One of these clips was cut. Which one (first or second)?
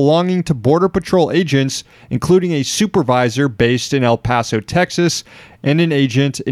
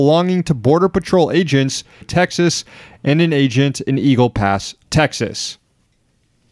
second